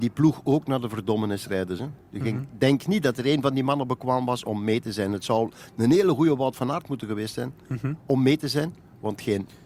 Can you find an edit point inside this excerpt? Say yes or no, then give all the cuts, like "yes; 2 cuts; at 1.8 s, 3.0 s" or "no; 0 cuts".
no; 0 cuts